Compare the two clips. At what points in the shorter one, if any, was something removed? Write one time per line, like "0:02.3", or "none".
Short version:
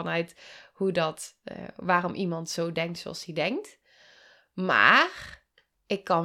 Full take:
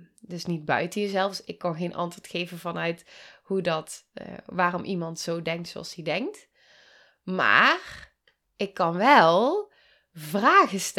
none